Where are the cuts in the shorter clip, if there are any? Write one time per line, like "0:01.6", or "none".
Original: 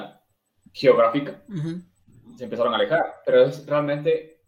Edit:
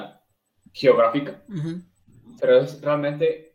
0:02.4